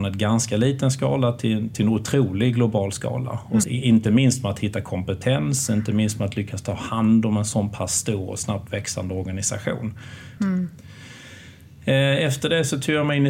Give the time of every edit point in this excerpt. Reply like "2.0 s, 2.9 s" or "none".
3.6 s, 10.4 s